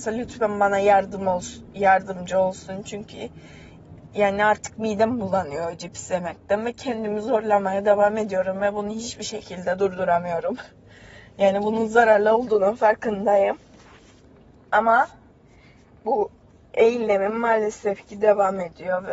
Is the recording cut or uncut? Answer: uncut